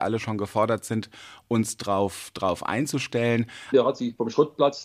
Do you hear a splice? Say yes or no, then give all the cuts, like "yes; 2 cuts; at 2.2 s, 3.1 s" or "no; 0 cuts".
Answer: yes; 1 cut; at 3.7 s